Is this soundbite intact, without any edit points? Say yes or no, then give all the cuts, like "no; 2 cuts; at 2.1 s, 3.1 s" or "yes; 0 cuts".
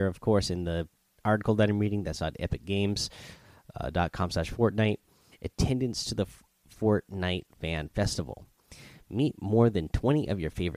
no; 1 cut; at 5.3 s